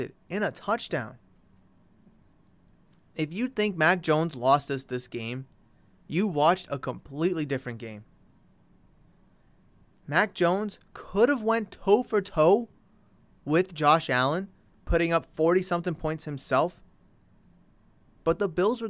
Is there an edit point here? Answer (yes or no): no